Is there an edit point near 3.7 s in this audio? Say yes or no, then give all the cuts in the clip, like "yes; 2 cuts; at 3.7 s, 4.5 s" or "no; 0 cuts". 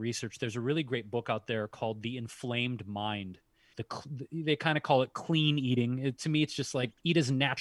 yes; 1 cut; at 3.7 s